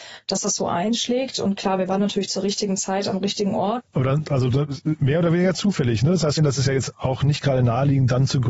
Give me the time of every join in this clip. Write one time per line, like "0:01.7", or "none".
0:03.8
0:06.4